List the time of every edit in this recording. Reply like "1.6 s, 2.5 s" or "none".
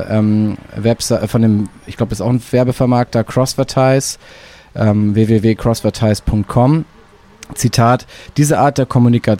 none